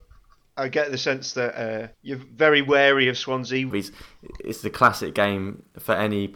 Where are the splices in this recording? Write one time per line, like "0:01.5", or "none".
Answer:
0:01.9
0:03.7